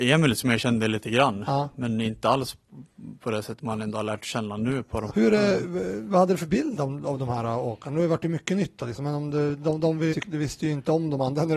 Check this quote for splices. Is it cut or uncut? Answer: cut